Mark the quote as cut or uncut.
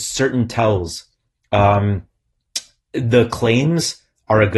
uncut